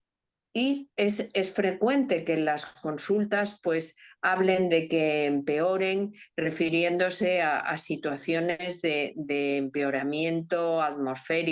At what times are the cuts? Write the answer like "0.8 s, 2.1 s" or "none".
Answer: none